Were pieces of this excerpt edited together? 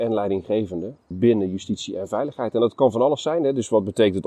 yes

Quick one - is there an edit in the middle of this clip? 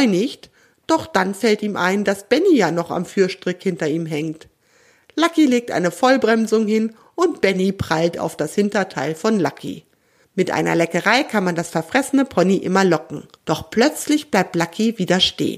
yes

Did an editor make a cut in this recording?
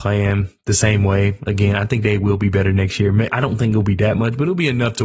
yes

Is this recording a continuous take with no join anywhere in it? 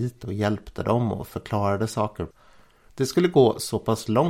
no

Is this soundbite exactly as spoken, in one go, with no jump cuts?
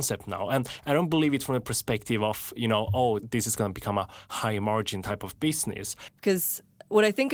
no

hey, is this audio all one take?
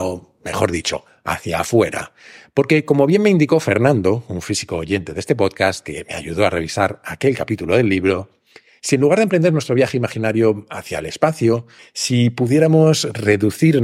no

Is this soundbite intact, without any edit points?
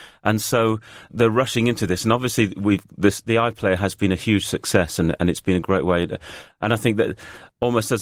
yes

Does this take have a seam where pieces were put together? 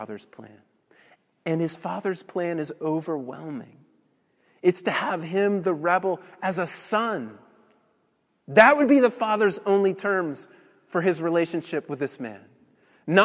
no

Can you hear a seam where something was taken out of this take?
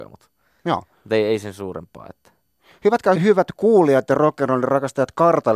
yes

